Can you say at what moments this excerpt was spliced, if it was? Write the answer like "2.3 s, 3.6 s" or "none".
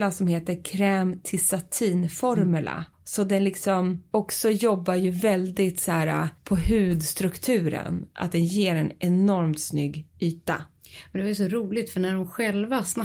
2.9 s